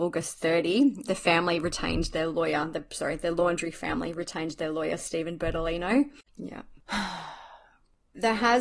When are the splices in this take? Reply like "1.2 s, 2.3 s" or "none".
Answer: 1.0 s, 6.3 s